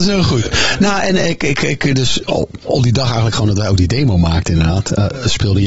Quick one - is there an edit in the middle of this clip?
no; 0 cuts

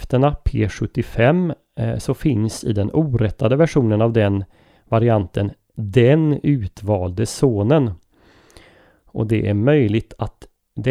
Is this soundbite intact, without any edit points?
yes; 0 cuts

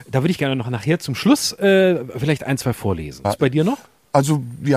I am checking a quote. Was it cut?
yes; 1 cut; at 3.2 s

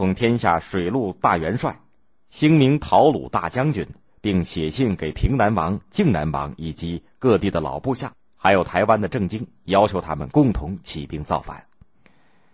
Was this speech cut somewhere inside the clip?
no; 0 cuts

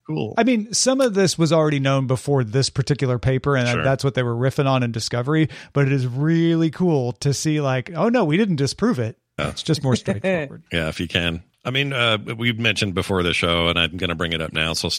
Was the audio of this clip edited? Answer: yes; 1 cut; at 9.4 s

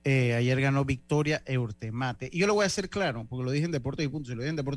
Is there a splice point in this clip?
no; 0 cuts

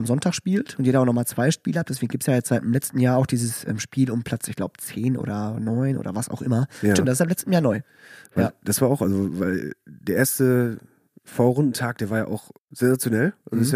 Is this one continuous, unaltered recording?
no; 1 cut; at 12.6 s

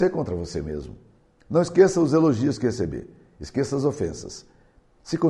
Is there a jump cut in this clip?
no; 0 cuts

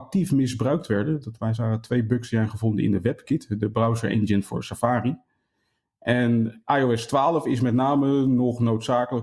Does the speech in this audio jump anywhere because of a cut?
no; 0 cuts

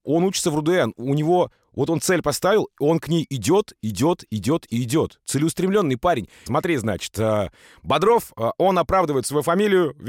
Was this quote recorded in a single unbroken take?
no; 1 cut; at 6.5 s

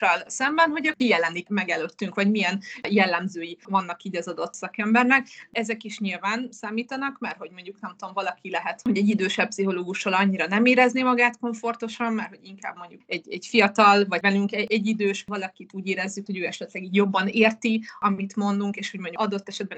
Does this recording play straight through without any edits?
no; 2 cuts; at 13.0 s, 16.3 s

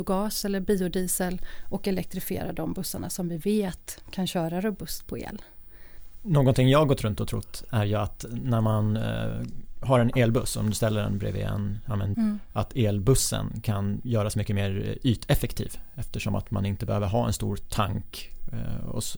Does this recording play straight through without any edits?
no; 1 cut; at 12.1 s

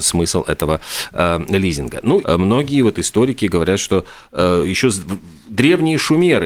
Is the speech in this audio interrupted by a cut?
yes; 1 cut; at 2.2 s

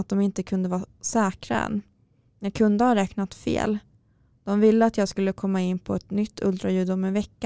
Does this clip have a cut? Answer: no; 0 cuts

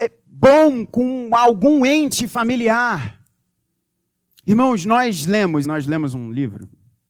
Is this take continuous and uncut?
no; 2 cuts; at 4.4 s, 5.6 s

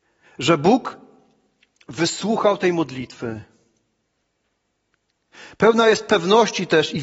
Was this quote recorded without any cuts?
yes; 0 cuts

